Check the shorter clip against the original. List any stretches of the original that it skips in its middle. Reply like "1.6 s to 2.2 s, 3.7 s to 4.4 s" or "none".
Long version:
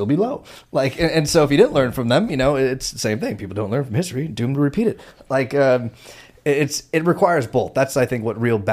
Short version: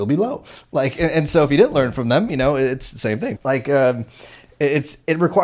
3.4 s to 5.2 s